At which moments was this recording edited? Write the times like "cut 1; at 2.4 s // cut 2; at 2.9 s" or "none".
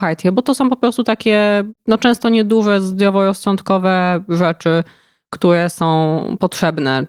none